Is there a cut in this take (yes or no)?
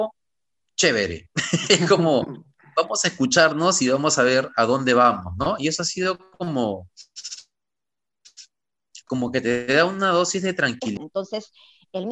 yes